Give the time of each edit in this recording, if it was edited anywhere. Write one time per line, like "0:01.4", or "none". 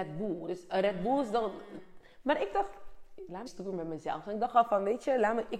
0:03.5